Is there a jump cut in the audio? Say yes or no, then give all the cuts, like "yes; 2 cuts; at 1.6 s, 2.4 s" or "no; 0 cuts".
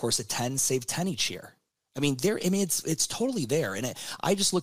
no; 0 cuts